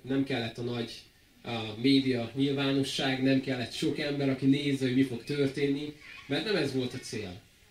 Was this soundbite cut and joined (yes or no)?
no